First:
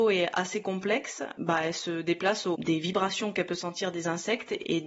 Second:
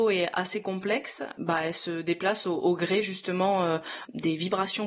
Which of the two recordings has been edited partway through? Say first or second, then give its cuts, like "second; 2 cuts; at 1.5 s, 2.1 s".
first; 1 cut; at 2.5 s